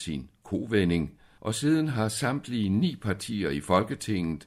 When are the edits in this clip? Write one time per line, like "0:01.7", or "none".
0:01.4